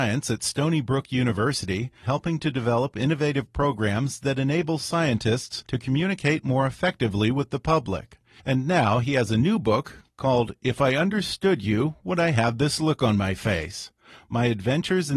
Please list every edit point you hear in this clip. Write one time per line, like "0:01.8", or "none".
0:02.0
0:08.4

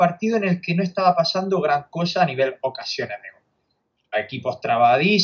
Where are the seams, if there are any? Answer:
none

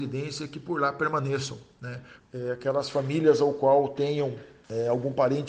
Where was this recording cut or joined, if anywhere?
0:02.2

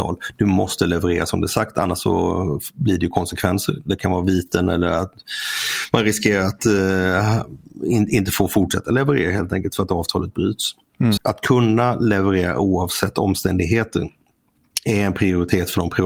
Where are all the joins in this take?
0:11.2

